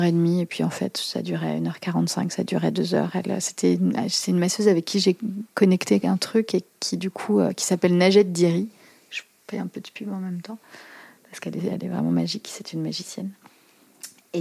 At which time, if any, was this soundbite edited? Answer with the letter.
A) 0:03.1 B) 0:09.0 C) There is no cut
C